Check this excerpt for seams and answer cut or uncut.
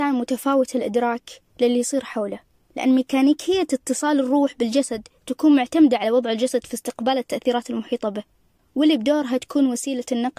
uncut